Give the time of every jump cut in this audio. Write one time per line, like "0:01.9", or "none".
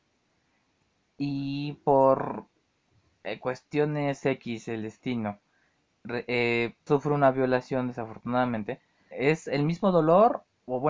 0:06.9
0:09.1